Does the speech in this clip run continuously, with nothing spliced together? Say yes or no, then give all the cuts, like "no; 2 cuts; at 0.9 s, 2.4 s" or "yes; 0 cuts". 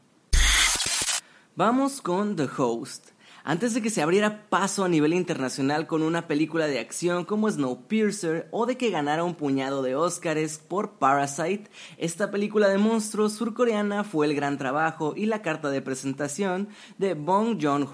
yes; 0 cuts